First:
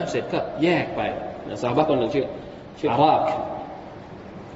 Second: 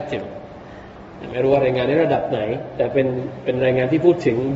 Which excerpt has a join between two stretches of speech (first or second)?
first